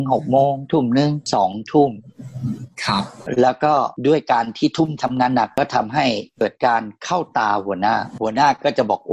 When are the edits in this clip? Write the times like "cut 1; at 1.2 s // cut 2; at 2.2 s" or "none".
cut 1; at 5.0 s